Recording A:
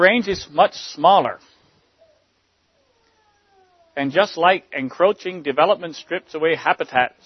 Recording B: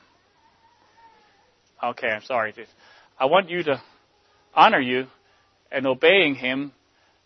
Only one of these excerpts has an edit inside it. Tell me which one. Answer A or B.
B